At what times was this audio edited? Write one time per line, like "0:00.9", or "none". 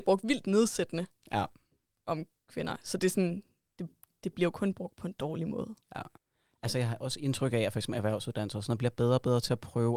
none